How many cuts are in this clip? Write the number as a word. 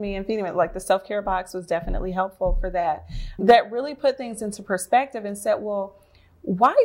one